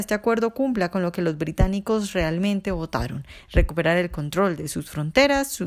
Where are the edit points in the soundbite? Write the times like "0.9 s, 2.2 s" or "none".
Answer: none